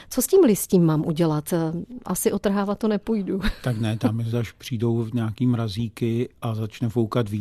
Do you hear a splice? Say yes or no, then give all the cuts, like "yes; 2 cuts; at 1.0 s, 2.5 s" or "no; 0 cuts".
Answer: yes; 1 cut; at 4.3 s